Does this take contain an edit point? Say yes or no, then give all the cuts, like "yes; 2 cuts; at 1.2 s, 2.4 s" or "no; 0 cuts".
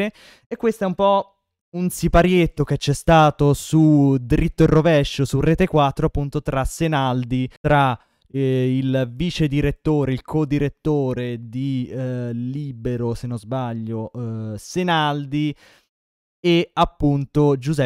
yes; 1 cut; at 7.6 s